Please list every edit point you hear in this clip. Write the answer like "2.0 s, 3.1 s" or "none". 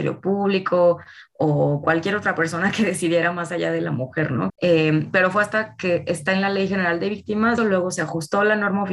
4.5 s, 7.6 s